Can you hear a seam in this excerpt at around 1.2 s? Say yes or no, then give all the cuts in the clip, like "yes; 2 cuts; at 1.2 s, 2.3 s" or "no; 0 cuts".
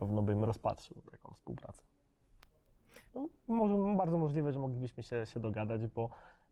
no; 2 cuts; at 3.1 s, 5.3 s